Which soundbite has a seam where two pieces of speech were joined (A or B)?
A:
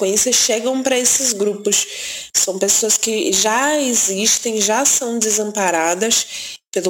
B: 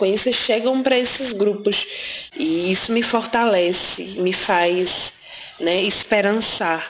B